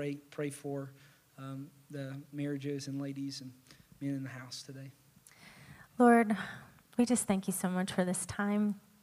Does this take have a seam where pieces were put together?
no; 0 cuts

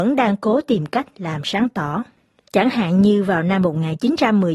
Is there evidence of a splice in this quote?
no; 0 cuts

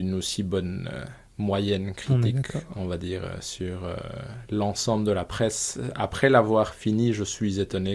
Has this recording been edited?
no; 0 cuts

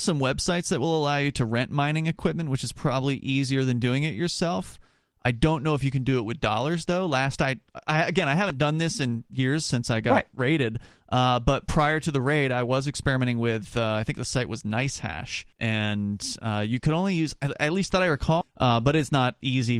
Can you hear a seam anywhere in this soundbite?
yes; 2 cuts; at 15.5 s, 18.4 s

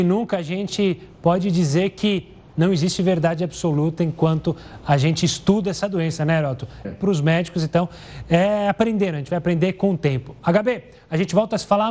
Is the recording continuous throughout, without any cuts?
no; 1 cut; at 6.8 s

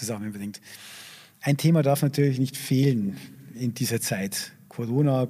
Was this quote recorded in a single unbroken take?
yes; 0 cuts

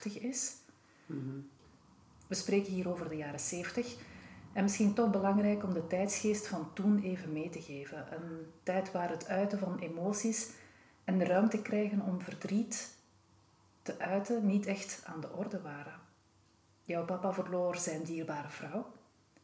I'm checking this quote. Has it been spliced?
no; 0 cuts

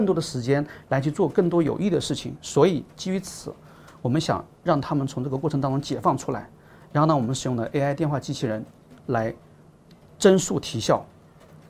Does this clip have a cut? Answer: no; 0 cuts

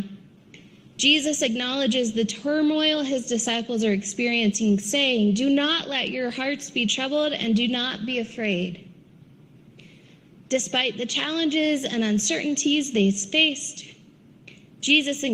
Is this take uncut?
yes; 0 cuts

